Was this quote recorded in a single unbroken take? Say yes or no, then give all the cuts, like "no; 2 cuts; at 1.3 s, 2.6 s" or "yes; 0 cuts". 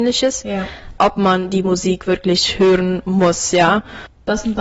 no; 1 cut; at 1.0 s